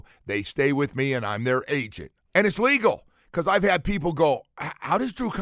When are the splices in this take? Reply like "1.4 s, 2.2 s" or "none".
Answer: 2.3 s